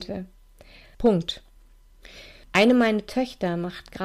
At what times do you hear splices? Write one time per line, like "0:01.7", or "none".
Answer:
0:00.9
0:02.4